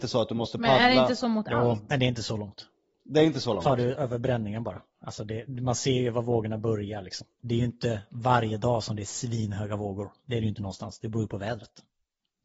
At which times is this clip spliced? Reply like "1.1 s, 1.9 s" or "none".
7.4 s